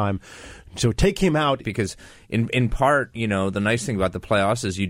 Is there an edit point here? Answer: yes; 1 cut; at 1.6 s

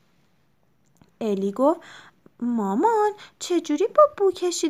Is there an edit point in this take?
no; 0 cuts

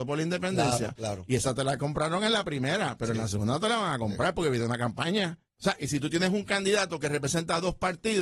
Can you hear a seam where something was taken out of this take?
yes; 1 cut; at 5.5 s

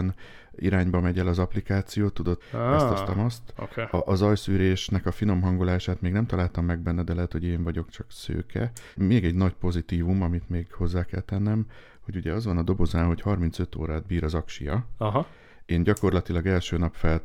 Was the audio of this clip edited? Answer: yes; 1 cut; at 2.4 s

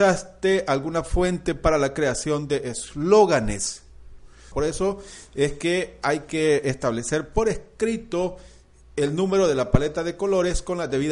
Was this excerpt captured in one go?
no; 1 cut; at 4.5 s

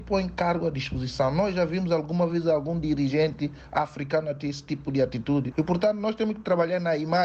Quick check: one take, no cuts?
no; 1 cut; at 5.5 s

